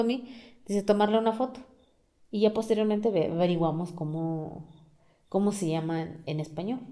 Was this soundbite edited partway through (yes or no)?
no